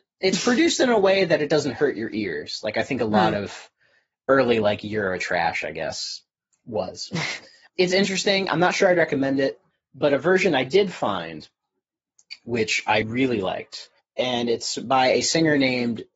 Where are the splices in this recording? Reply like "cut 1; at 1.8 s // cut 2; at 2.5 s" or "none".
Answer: cut 1; at 13.0 s